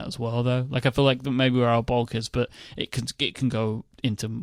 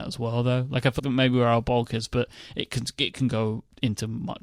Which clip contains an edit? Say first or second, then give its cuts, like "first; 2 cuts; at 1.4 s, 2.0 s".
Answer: second; 1 cut; at 1.0 s